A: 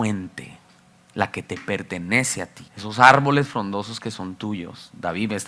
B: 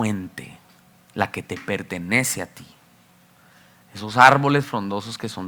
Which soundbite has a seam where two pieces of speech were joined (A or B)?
A